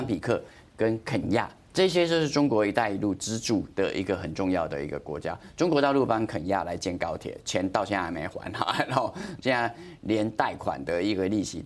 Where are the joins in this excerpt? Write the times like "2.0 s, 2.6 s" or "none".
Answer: 9.4 s